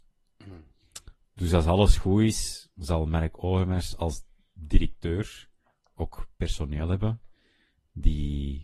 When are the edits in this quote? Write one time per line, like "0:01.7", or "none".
0:01.2